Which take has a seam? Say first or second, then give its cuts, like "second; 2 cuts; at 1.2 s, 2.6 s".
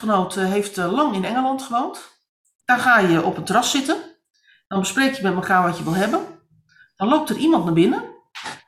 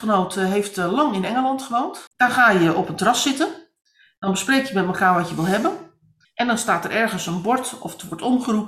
second; 2 cuts; at 2.1 s, 6.2 s